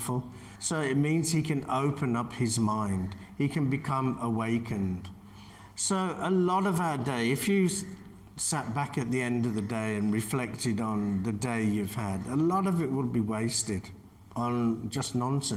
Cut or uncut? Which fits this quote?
uncut